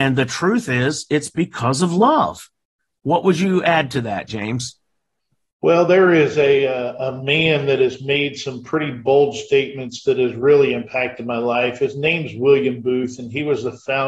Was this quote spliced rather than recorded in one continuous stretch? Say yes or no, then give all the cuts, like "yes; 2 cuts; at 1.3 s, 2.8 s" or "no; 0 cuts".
no; 0 cuts